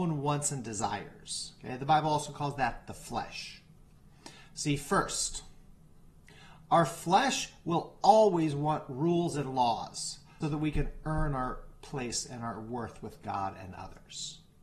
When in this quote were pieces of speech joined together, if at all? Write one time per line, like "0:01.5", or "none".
0:10.4